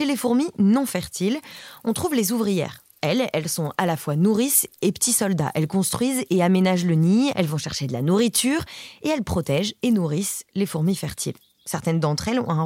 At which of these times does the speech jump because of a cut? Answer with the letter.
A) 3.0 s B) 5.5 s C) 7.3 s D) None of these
C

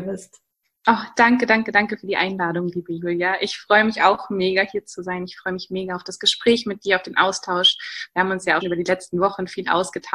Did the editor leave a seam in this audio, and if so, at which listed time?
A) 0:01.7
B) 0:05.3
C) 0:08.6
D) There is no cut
C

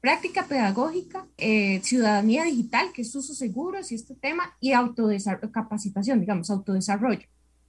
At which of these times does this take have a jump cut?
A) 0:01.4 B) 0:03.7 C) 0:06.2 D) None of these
A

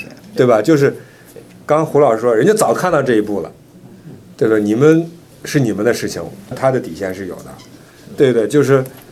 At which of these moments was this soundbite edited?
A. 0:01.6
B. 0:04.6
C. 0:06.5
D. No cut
C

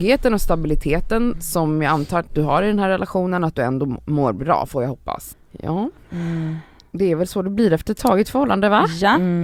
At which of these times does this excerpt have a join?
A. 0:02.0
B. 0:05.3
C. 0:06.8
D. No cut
B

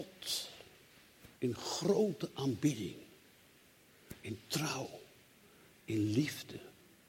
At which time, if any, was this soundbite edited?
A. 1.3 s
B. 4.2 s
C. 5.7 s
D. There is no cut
A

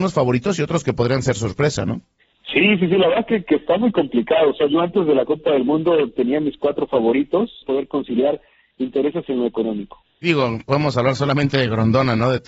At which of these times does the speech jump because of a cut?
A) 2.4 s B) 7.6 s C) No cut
B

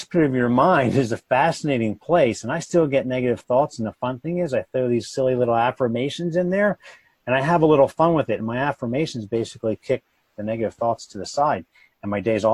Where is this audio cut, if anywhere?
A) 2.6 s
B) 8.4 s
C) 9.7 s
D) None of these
D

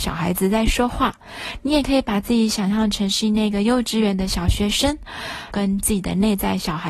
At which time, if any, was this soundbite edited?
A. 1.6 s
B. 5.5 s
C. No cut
B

